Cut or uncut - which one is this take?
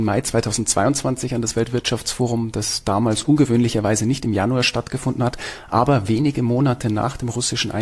uncut